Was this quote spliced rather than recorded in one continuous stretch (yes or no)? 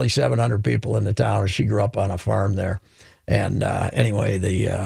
no